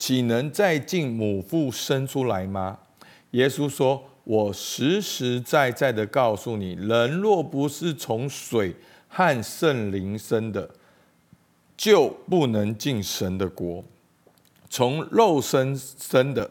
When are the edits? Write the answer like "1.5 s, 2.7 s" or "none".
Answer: none

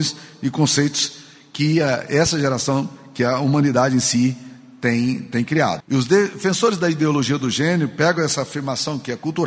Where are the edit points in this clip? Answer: 5.8 s

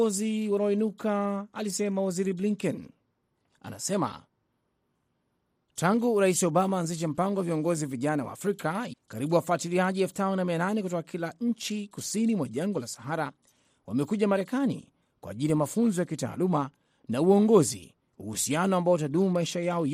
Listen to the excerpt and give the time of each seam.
8.9 s, 18.1 s

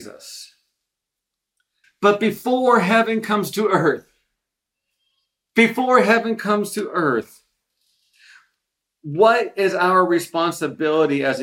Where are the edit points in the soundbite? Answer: 1.8 s

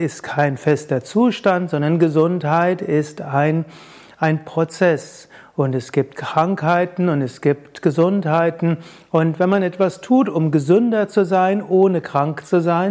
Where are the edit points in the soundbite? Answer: none

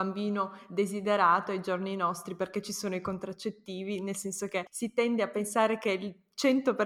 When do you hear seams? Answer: none

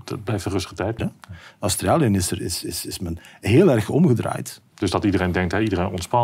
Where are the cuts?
1.0 s, 4.7 s

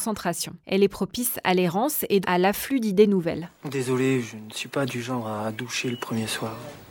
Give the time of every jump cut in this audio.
2.2 s

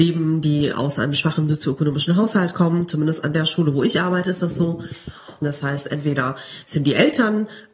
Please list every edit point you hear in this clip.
5.4 s

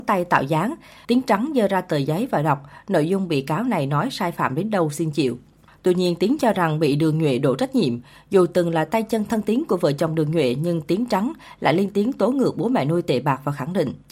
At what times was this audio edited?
1.0 s

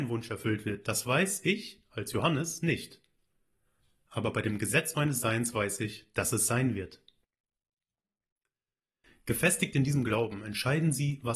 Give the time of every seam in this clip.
none

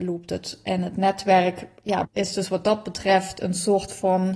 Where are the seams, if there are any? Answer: 2.0 s

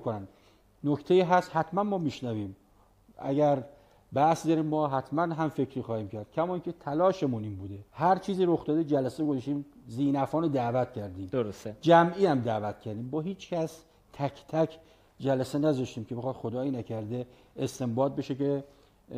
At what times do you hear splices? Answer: 7.9 s

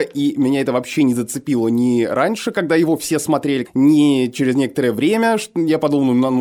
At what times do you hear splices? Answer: 3.6 s

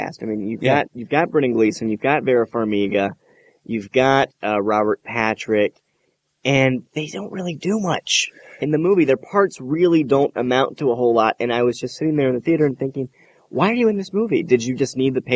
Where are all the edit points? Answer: none

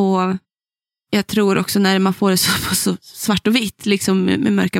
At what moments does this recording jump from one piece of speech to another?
none

